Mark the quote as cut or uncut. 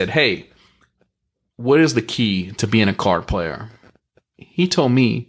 uncut